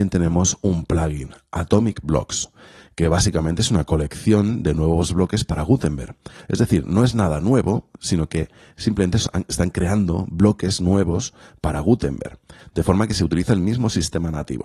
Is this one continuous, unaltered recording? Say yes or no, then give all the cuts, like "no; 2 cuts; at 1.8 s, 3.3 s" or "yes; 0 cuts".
yes; 0 cuts